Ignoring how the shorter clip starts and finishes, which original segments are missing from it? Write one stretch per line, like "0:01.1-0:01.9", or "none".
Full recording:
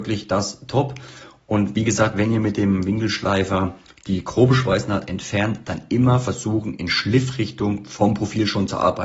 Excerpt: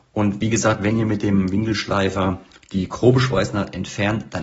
none